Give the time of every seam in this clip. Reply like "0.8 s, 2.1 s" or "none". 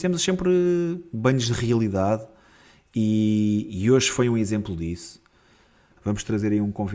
6.0 s